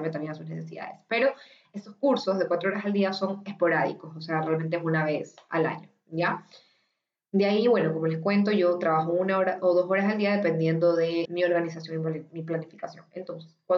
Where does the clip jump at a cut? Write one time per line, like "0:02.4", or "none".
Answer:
0:11.3